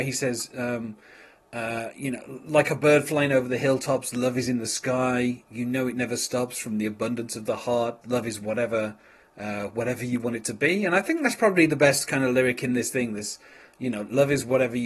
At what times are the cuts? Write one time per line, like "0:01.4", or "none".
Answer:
0:08.0